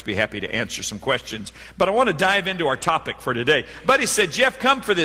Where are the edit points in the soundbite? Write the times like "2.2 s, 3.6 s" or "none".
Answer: none